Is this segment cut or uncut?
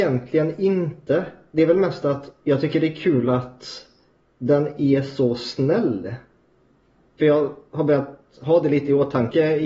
uncut